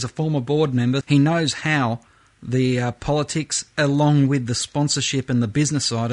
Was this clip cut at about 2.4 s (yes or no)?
no